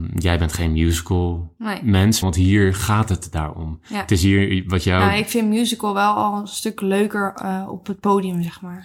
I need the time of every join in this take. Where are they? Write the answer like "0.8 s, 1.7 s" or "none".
2.2 s